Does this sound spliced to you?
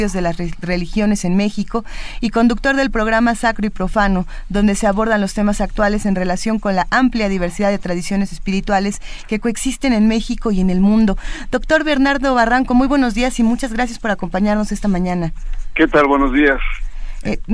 no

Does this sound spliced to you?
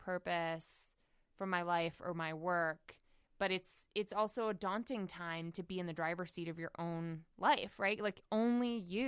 no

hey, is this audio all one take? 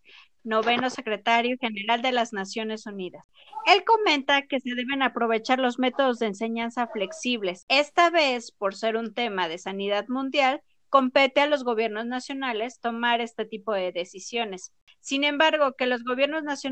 yes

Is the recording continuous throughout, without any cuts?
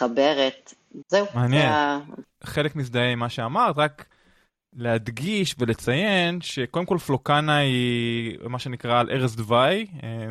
no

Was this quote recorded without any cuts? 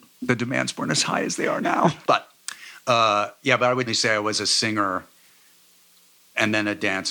no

